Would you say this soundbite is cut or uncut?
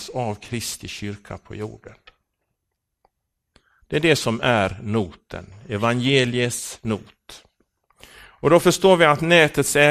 uncut